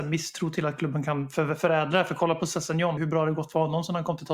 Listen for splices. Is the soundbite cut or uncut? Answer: cut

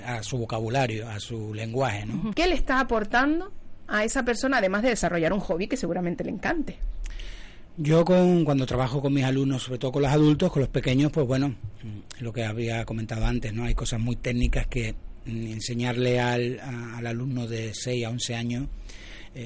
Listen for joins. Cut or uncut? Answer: cut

